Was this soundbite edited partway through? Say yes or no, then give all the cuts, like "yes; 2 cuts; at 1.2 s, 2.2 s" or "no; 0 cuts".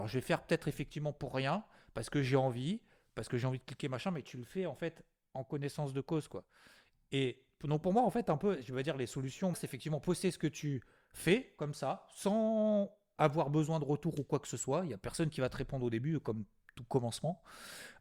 yes; 1 cut; at 9.5 s